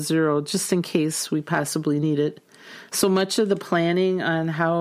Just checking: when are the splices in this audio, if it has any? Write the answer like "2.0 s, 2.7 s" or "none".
2.9 s